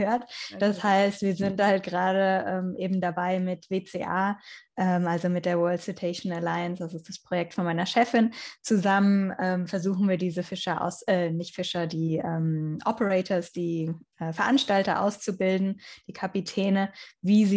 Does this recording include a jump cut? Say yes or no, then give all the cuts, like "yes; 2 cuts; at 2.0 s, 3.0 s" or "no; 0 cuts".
no; 0 cuts